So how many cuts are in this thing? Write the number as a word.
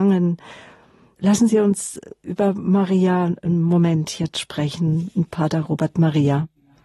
one